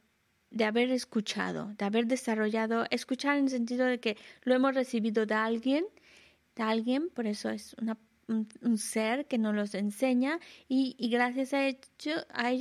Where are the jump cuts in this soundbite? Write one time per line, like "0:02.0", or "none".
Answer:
none